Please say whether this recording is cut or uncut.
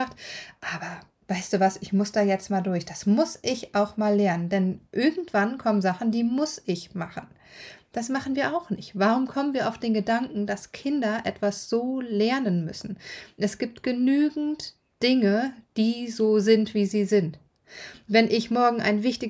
uncut